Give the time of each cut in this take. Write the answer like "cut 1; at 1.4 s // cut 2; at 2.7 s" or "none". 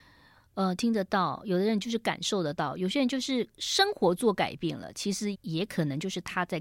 cut 1; at 5.3 s